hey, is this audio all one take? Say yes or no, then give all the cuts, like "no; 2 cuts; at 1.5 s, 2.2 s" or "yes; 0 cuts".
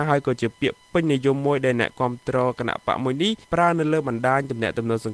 no; 1 cut; at 3.4 s